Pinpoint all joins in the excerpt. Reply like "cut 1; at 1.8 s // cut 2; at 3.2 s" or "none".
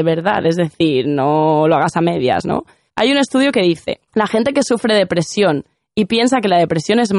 cut 1; at 2.9 s // cut 2; at 4.1 s